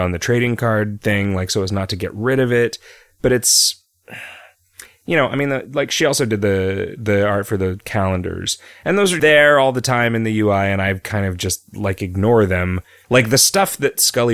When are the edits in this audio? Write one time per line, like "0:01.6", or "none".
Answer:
0:09.2
0:13.0